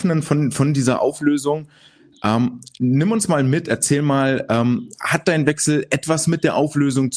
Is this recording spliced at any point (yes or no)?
no